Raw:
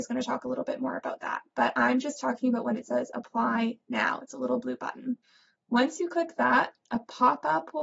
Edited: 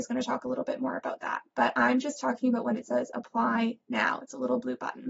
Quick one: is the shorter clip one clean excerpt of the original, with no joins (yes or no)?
yes